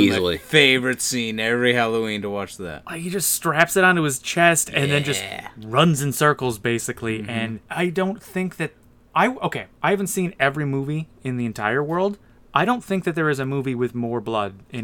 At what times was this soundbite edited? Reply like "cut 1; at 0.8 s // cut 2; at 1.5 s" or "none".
cut 1; at 7.6 s

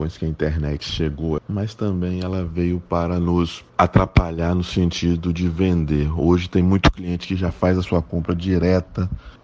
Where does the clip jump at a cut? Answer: cut 1; at 1.4 s // cut 2; at 3.7 s

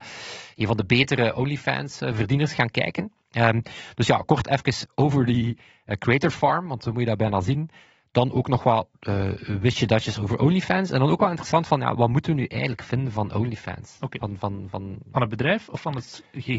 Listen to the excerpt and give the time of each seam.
none

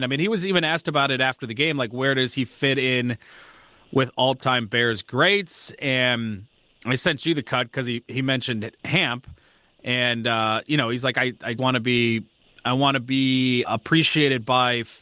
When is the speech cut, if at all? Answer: cut 1; at 11.6 s // cut 2; at 13.6 s

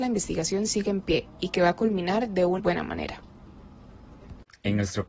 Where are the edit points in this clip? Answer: cut 1; at 2.6 s

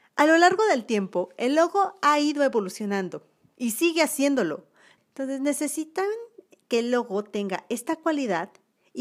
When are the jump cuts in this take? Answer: cut 1; at 5.0 s

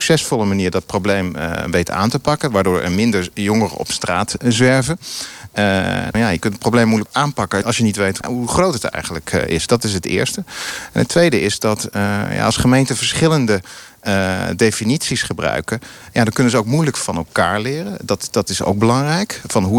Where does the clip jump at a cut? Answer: cut 1; at 6.1 s

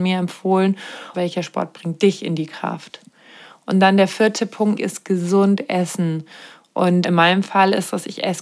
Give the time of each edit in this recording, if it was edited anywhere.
cut 1; at 1.1 s // cut 2; at 4.8 s

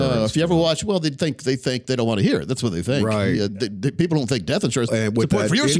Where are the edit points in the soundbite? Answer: cut 1; at 3.5 s // cut 2; at 4.9 s

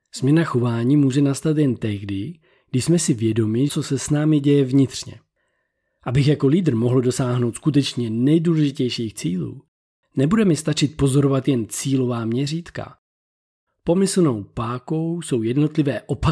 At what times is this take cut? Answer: cut 1; at 3.7 s // cut 2; at 13.7 s

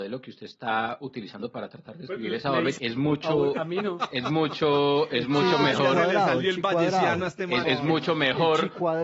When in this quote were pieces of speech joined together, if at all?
cut 1; at 2.8 s // cut 2; at 7.6 s

